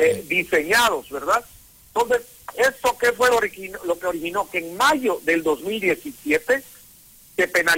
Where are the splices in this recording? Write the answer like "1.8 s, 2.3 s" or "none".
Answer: none